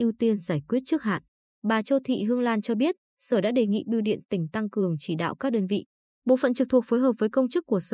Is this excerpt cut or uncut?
cut